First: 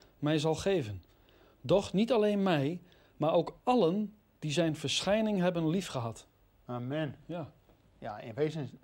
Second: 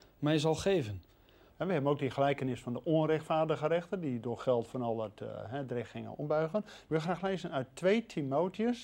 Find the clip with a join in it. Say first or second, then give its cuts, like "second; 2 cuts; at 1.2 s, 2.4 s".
second; 2 cuts; at 1.5 s, 6.9 s